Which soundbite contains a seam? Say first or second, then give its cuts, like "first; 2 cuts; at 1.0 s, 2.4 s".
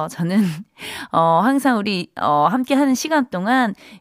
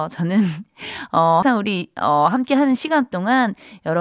second; 1 cut; at 1.4 s